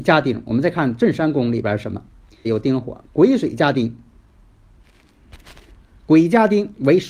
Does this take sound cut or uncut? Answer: cut